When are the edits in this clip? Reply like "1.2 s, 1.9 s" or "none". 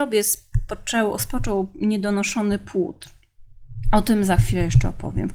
none

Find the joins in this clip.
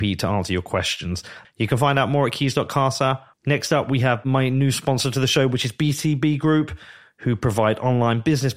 1.4 s, 3.3 s

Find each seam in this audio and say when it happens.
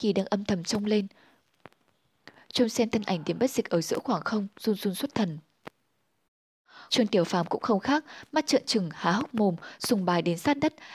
6.9 s

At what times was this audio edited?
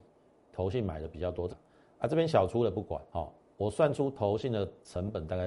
1.5 s, 3.1 s

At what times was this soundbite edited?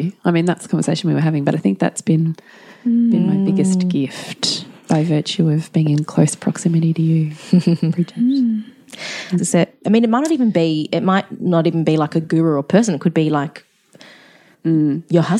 9.4 s

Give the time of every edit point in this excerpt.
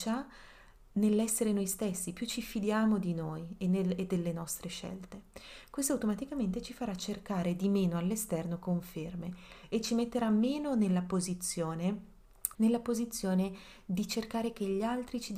12.5 s

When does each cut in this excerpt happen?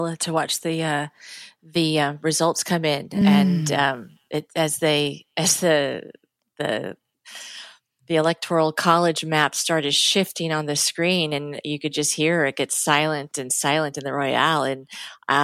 none

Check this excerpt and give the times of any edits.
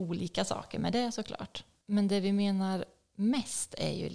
1.8 s

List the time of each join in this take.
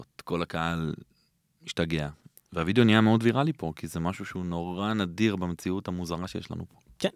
none

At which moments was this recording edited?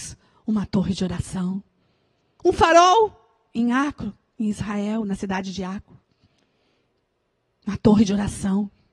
2.4 s

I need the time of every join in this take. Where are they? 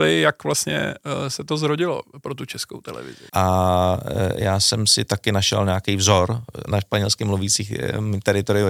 3.3 s, 6.7 s

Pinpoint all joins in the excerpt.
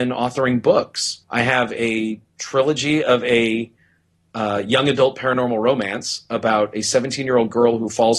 1.2 s

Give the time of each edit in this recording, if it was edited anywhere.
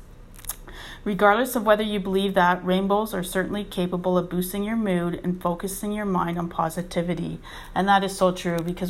none

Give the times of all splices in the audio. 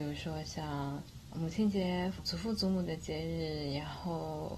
2.2 s

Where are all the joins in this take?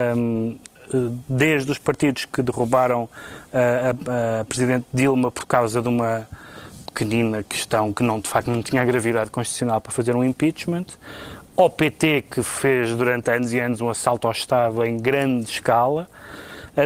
none

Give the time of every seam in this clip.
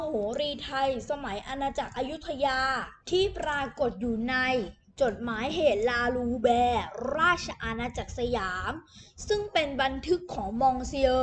3.0 s

